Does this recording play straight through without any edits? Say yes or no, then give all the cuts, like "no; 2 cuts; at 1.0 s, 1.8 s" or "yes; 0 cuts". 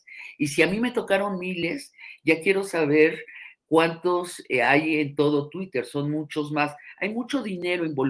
yes; 0 cuts